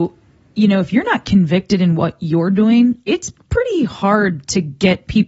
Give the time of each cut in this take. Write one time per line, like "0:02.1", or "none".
none